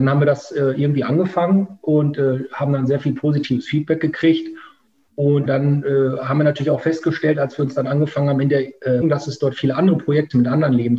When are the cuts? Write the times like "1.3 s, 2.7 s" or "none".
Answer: 5.5 s, 9.0 s